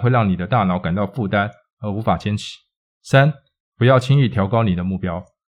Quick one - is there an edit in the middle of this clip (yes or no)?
no